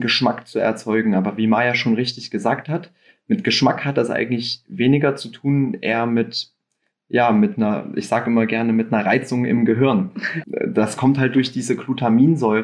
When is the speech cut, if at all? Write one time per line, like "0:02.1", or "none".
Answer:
0:10.4